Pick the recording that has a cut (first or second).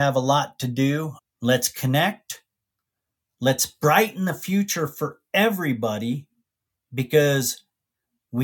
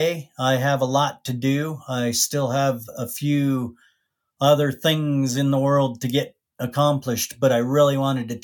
first